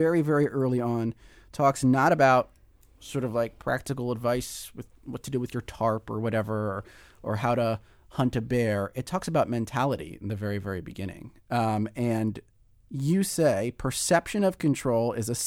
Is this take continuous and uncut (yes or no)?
yes